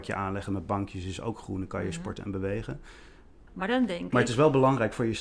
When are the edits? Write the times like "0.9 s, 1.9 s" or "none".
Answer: 3.5 s

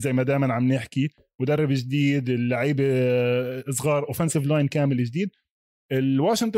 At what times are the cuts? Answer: none

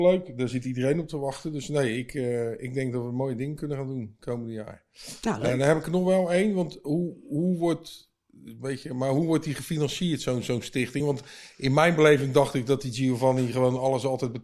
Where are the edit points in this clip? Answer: none

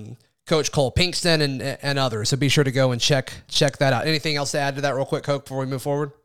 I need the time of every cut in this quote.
3.4 s

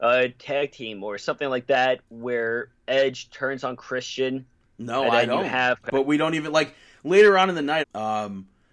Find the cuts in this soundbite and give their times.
5.8 s, 7.8 s

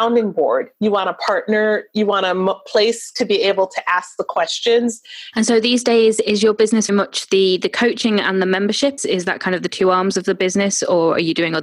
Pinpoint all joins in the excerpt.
5.3 s, 6.9 s, 9.0 s

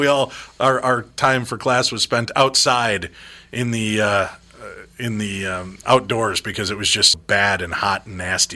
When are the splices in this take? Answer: 5.8 s, 7.1 s

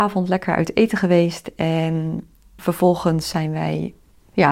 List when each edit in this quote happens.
2.6 s

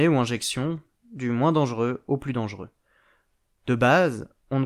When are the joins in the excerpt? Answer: none

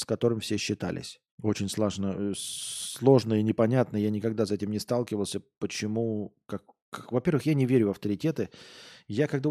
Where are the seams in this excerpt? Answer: 1.3 s

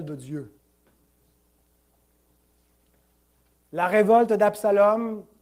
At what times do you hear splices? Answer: 3.6 s

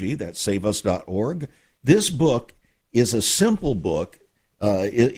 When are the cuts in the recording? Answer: 1.8 s

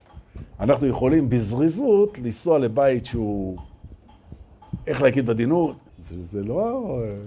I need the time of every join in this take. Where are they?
5.9 s

